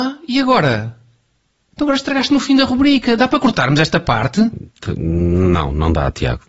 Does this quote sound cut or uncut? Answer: uncut